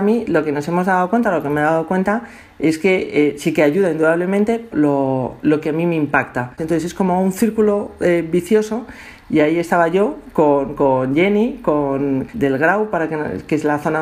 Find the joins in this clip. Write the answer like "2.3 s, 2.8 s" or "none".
4.7 s, 6.6 s, 12.3 s